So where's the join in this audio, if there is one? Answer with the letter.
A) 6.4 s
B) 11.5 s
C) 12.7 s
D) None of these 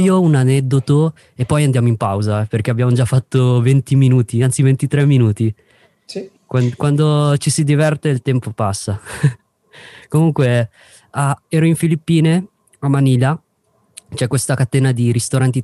A